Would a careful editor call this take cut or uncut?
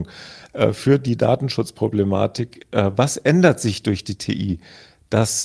uncut